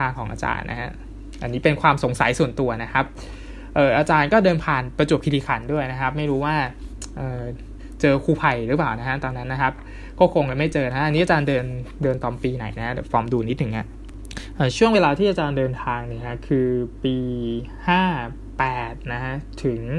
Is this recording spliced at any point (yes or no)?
no